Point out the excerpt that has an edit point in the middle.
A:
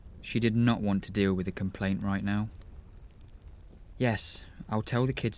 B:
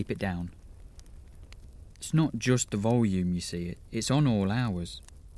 B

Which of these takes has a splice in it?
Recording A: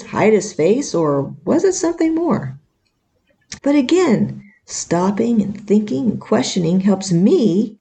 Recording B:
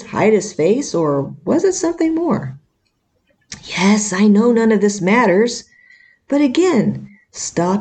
A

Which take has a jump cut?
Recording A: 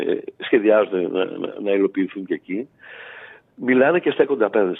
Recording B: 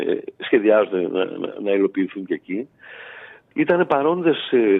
B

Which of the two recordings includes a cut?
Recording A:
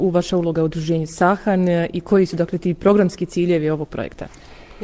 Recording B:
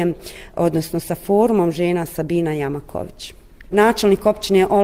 B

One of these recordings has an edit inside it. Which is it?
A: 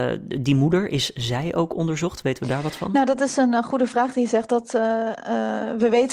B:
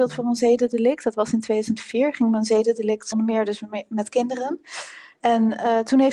B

